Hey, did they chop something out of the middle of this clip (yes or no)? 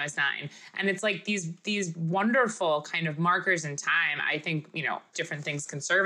yes